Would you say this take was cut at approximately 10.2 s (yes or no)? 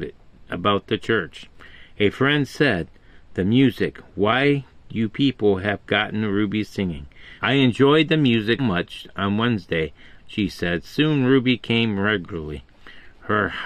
yes